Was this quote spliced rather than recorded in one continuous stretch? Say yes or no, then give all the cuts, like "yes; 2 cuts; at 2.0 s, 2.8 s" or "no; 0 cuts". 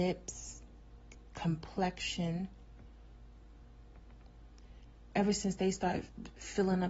yes; 1 cut; at 5.1 s